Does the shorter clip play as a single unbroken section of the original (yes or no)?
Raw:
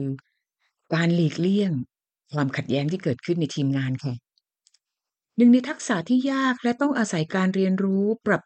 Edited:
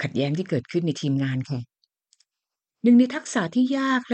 yes